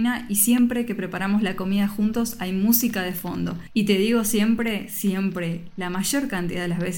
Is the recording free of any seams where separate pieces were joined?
yes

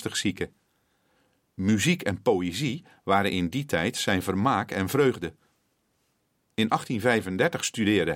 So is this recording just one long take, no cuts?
yes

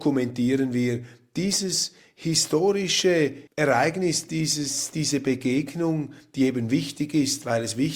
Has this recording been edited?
yes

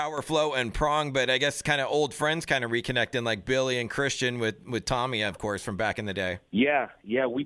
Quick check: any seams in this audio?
no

